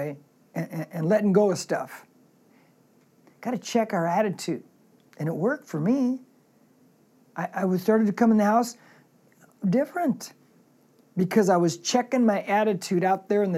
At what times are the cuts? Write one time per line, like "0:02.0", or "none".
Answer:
0:03.2
0:05.1